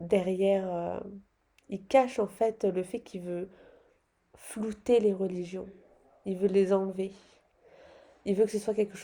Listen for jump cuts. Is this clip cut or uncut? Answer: uncut